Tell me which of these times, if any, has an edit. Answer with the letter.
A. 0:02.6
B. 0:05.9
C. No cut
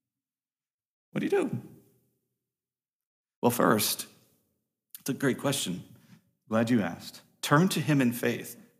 C